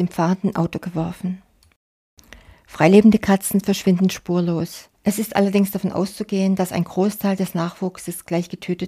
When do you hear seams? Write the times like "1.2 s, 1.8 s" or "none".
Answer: 5.0 s